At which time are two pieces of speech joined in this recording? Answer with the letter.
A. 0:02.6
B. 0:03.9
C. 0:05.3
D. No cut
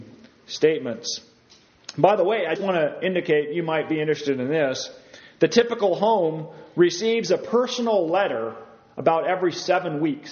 A